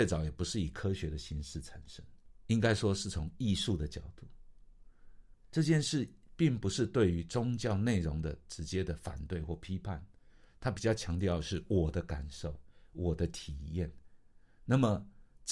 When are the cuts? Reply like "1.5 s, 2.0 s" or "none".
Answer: 5.3 s